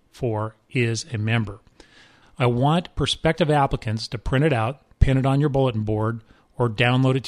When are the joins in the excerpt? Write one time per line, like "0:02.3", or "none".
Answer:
0:02.2
0:04.9